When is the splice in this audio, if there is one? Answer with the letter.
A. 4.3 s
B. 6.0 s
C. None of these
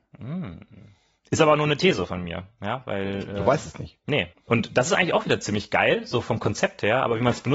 A